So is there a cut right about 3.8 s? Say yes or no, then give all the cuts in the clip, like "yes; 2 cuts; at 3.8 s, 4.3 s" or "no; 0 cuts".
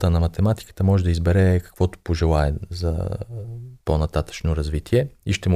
yes; 1 cut; at 3.8 s